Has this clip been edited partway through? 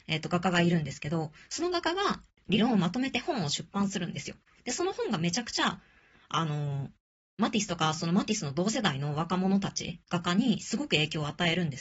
no; 0 cuts

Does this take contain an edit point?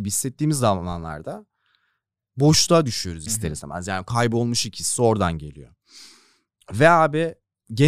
no; 0 cuts

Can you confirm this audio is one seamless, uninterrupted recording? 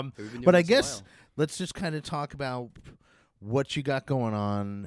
yes; 0 cuts

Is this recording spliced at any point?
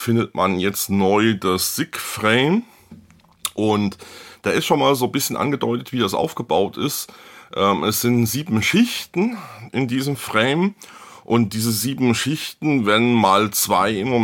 no; 0 cuts

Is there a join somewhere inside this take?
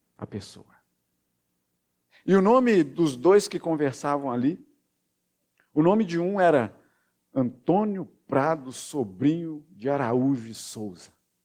yes; 1 cut; at 2.1 s

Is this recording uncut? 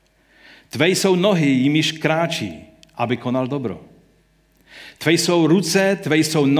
no; 1 cut; at 5.0 s

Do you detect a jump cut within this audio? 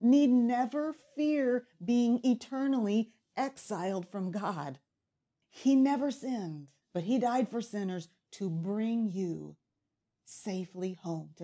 yes; 2 cuts; at 5.4 s, 6.8 s

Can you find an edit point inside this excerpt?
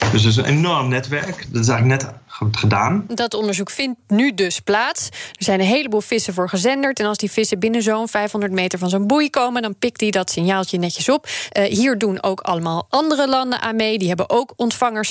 yes; 1 cut; at 11.5 s

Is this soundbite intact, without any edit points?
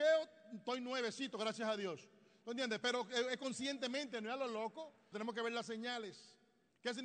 no; 1 cut; at 5.1 s

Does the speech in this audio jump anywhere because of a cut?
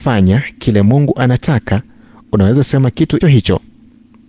yes; 1 cut; at 3.2 s

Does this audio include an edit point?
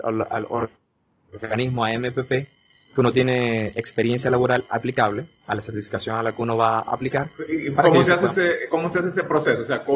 no; 0 cuts

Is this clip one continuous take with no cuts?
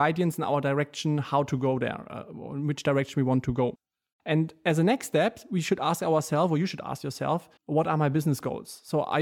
no; 1 cut; at 7.6 s

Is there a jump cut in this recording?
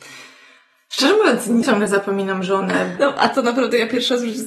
yes; 2 cuts; at 1.6 s, 3.0 s

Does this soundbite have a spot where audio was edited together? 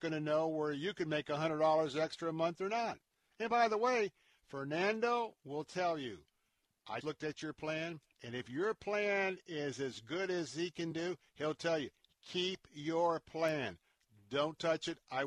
yes; 1 cut; at 7.0 s

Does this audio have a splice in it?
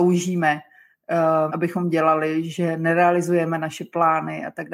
yes; 1 cut; at 1.5 s

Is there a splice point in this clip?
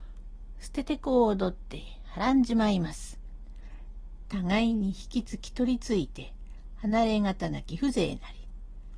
yes; 1 cut; at 4.3 s

